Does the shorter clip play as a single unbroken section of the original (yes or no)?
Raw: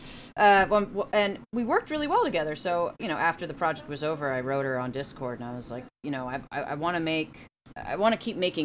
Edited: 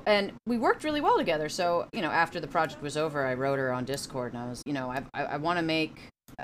no